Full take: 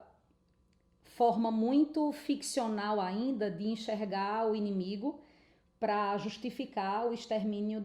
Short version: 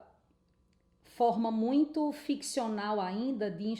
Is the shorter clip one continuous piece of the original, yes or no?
yes